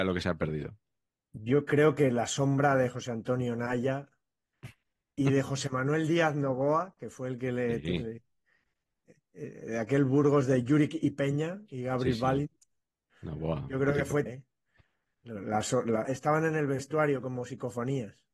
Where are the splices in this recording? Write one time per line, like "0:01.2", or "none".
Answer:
0:14.3
0:16.0